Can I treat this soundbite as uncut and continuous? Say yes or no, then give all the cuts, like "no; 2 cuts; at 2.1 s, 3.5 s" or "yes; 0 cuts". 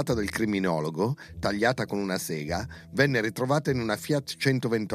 yes; 0 cuts